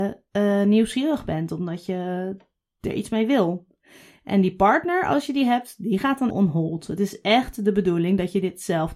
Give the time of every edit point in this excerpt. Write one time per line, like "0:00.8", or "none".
0:06.3

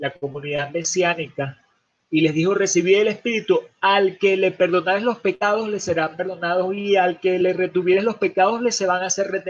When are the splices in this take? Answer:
0:02.0

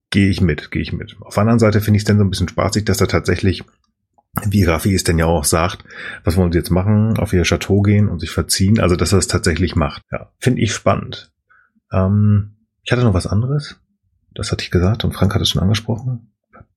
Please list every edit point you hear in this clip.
0:10.0

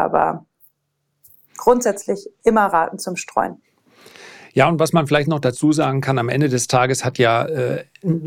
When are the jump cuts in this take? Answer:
none

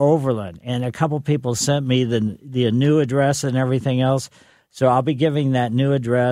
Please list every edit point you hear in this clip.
none

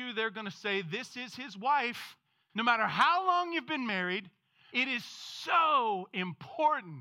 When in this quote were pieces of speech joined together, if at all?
0:02.5
0:04.7

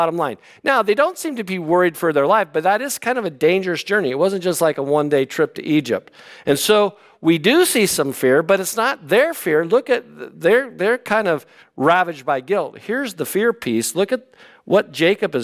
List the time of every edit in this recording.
none

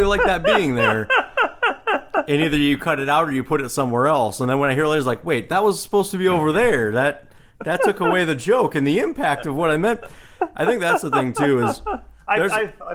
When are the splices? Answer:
none

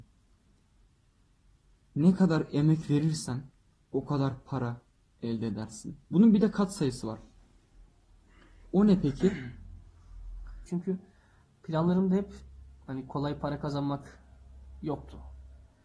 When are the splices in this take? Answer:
0:06.0
0:10.6

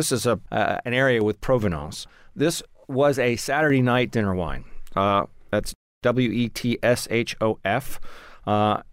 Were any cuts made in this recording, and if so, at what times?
0:04.9

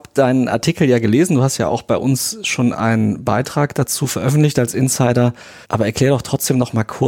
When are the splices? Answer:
0:05.6

